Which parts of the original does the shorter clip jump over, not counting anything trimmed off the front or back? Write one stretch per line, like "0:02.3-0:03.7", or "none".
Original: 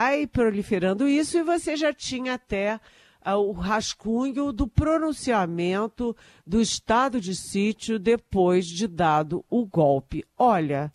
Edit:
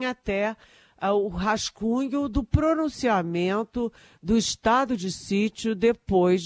none